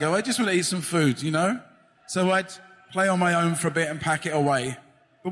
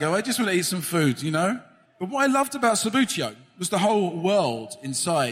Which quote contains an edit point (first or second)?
second